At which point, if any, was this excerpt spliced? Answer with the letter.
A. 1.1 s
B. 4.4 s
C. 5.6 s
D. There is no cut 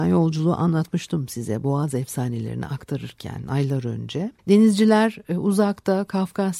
B